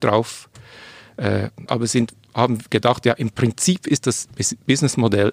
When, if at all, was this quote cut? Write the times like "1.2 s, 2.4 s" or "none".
1.7 s